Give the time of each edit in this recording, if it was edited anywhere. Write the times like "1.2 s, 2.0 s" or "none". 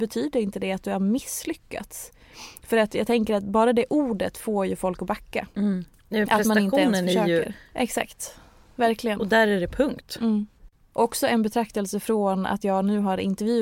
7.7 s